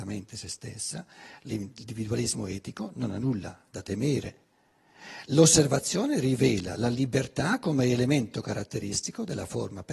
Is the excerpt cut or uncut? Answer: uncut